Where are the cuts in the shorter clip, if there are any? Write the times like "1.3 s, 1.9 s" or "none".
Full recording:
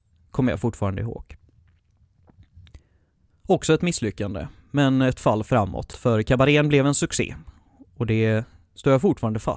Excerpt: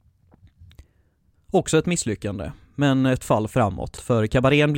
none